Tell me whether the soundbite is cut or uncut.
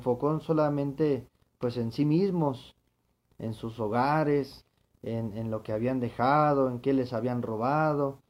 uncut